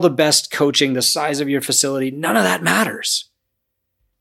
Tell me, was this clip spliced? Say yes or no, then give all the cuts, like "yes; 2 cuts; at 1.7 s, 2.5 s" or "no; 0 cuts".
no; 0 cuts